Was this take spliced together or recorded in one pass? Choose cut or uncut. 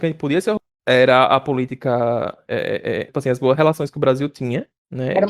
cut